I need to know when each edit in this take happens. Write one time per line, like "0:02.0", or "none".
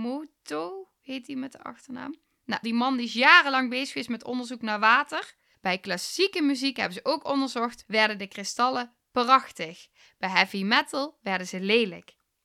0:02.6
0:05.5
0:07.8